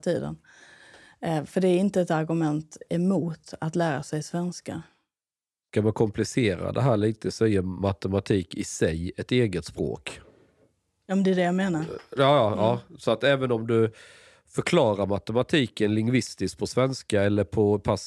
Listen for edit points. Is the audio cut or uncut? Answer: uncut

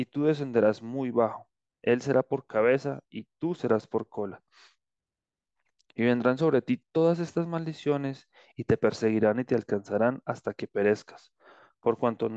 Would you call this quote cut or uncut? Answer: cut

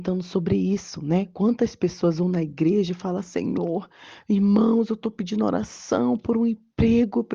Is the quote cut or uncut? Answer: uncut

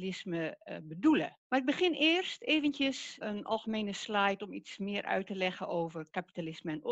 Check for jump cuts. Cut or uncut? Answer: cut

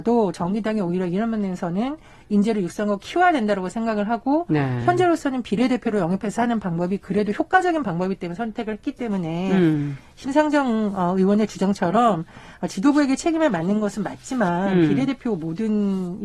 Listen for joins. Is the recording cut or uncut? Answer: uncut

